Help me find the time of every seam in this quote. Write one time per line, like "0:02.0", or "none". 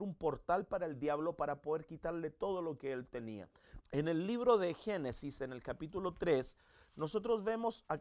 0:03.8